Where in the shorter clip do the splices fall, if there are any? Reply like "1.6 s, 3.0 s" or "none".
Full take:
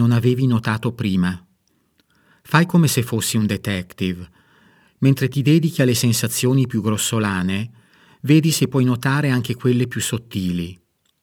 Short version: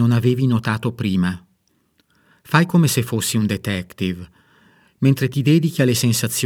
none